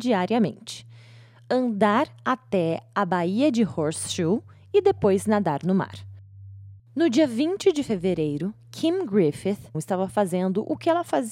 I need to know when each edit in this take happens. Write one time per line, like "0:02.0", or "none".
0:06.8
0:09.7